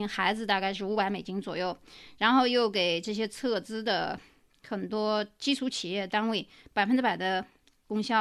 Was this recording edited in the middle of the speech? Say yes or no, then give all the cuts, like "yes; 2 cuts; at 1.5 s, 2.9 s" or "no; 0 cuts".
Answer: no; 0 cuts